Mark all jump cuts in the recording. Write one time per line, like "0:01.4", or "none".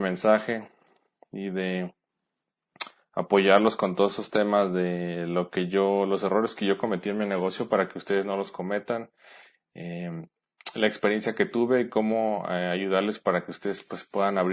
none